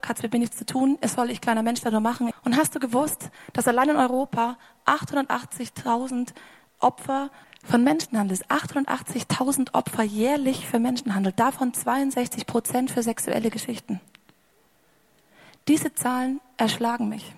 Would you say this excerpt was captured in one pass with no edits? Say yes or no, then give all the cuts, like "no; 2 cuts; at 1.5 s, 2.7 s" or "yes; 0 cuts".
no; 1 cut; at 2.3 s